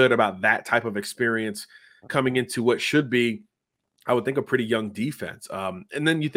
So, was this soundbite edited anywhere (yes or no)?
no